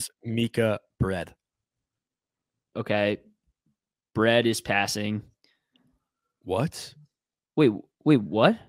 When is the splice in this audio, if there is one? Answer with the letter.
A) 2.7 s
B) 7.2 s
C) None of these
A